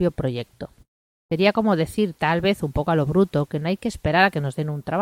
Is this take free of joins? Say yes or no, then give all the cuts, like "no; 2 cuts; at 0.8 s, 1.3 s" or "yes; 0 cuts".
no; 1 cut; at 1.2 s